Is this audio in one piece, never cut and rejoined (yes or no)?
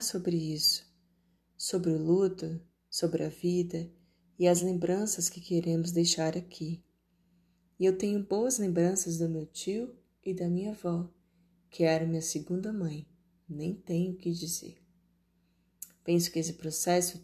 yes